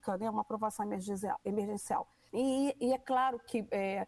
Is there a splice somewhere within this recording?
yes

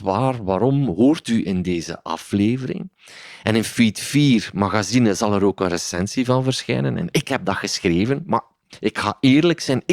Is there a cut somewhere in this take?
no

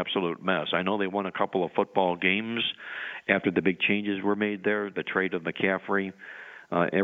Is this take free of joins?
yes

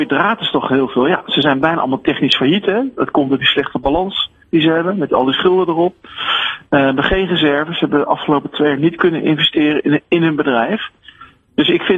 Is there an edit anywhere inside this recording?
no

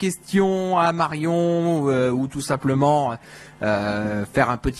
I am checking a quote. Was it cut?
no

